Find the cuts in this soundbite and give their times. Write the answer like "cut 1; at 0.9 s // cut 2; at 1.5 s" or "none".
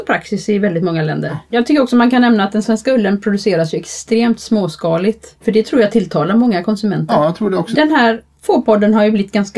cut 1; at 1.5 s